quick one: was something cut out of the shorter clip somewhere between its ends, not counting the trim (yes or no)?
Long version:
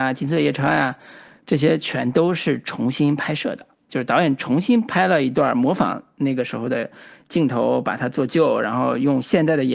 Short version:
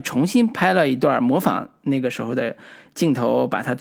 no